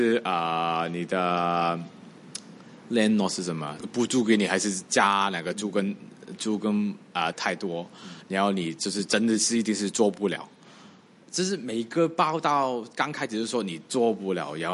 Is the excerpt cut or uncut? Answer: cut